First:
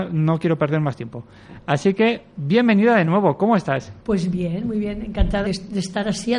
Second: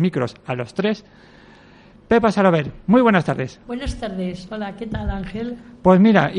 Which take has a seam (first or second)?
first